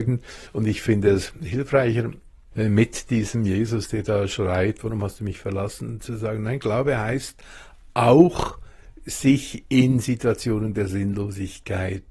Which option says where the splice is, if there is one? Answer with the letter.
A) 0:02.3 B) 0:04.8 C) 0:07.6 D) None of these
B